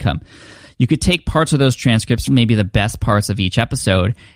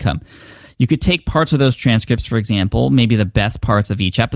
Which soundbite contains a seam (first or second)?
first